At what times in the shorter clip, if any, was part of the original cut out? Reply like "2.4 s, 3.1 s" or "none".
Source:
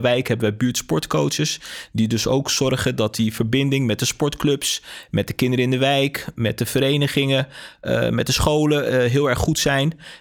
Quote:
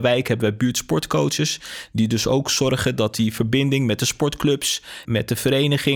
5.0 s